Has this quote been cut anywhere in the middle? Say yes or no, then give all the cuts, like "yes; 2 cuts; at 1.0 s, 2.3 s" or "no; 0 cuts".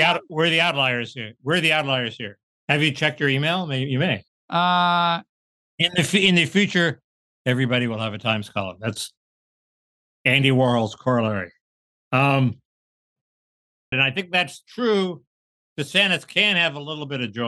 yes; 2 cuts; at 4.3 s, 13.9 s